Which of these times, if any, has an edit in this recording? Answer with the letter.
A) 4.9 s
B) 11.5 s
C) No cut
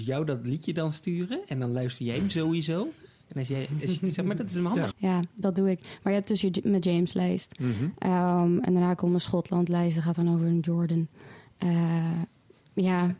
A